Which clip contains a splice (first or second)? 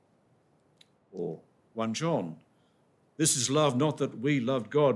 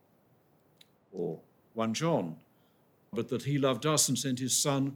second